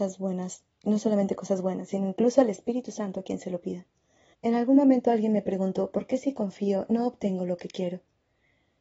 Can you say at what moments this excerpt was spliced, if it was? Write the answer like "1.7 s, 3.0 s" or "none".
4.3 s, 5.9 s